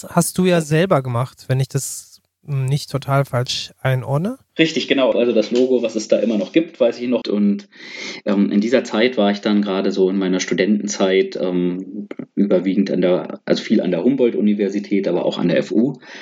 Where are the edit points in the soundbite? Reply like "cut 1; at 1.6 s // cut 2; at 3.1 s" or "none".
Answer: cut 1; at 5.1 s // cut 2; at 7.2 s